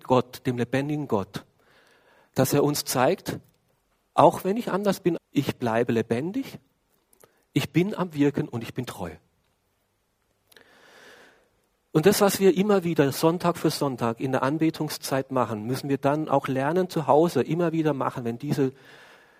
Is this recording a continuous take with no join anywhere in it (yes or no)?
no